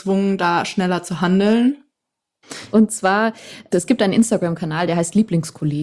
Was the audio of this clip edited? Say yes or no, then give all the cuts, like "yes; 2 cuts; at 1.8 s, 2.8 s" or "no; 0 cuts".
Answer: yes; 1 cut; at 2.7 s